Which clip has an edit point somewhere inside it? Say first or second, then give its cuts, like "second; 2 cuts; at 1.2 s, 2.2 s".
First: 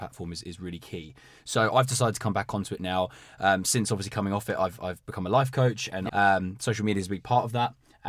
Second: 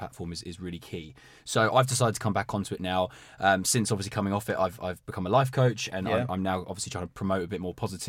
first; 1 cut; at 6.1 s